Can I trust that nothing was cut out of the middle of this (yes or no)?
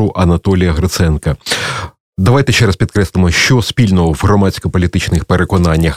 yes